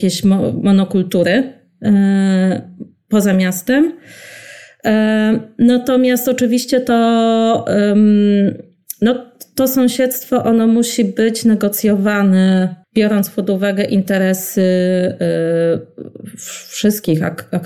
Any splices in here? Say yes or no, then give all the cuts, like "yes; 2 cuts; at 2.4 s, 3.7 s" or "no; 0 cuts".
yes; 1 cut; at 12.8 s